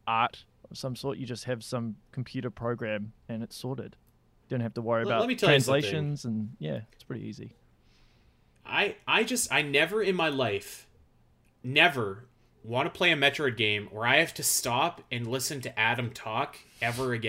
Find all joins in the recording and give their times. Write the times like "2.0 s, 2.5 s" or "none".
3.2 s

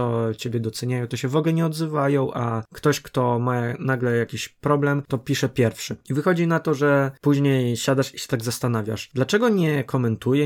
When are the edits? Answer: none

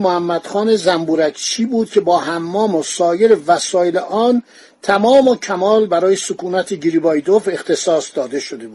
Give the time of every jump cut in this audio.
none

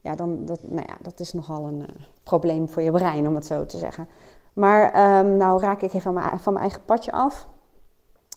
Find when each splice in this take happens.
none

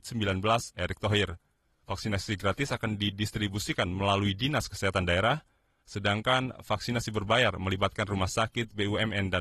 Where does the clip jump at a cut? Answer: 1.6 s

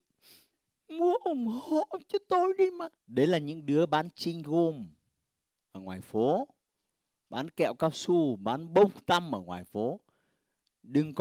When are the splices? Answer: 3.0 s

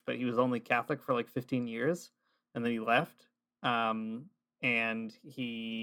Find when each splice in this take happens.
none

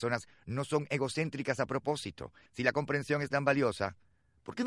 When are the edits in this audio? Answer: 2.5 s

